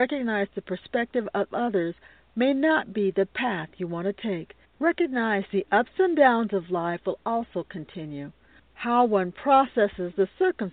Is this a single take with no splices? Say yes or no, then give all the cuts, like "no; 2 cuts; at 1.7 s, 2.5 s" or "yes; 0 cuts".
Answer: no; 1 cut; at 4.6 s